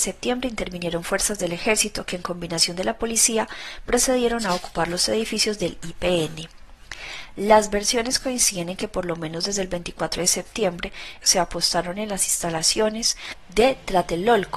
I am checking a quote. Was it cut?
yes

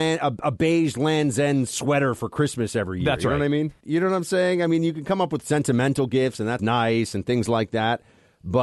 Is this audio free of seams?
no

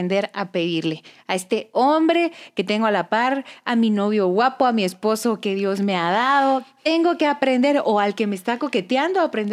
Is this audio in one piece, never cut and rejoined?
yes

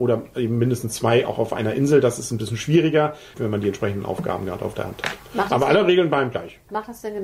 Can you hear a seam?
yes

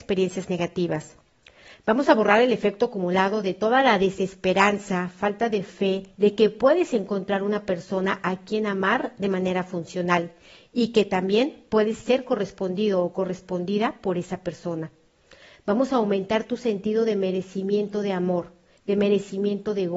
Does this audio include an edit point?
yes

